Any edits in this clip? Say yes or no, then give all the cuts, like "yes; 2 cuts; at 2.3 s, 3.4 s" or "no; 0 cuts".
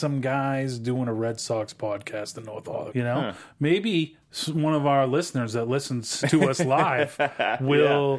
yes; 2 cuts; at 2.9 s, 6.2 s